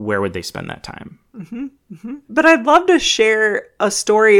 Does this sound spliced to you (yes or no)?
yes